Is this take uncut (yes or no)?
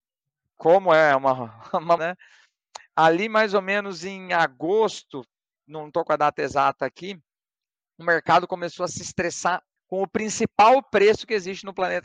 no